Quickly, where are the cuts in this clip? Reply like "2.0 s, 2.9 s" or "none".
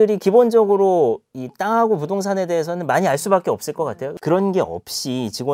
4.2 s